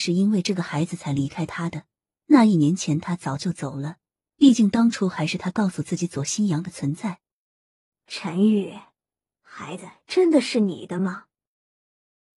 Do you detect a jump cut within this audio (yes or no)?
no